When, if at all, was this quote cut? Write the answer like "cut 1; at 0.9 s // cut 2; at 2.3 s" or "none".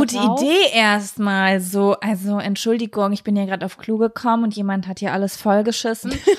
none

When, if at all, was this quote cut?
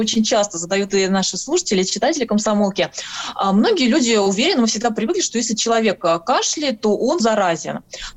cut 1; at 7.2 s

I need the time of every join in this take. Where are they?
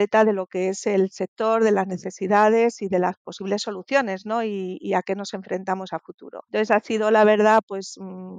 cut 1; at 6.5 s

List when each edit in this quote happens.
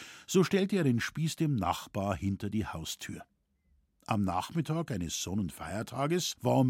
none

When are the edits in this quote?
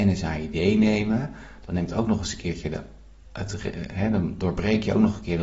none

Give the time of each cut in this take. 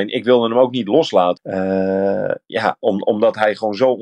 cut 1; at 1.4 s

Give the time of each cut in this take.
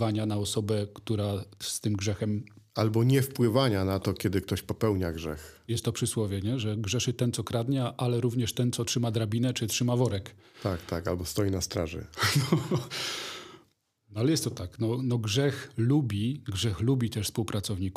none

